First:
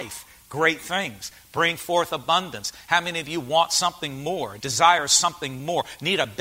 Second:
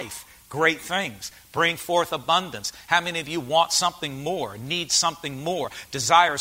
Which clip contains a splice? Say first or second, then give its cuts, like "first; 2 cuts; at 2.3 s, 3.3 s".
first; 1 cut; at 4.6 s